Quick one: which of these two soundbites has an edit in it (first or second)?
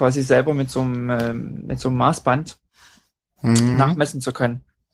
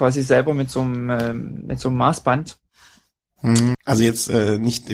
second